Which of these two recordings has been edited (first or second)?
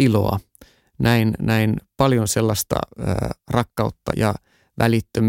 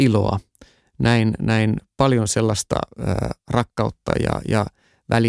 first